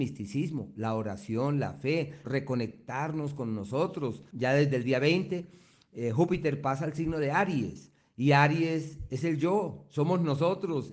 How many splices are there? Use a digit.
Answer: 2